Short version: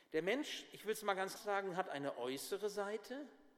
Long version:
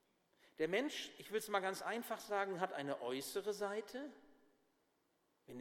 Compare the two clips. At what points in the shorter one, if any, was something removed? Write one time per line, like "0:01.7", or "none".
0:01.3